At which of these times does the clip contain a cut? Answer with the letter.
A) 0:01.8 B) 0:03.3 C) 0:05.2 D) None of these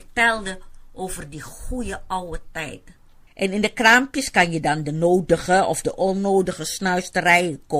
B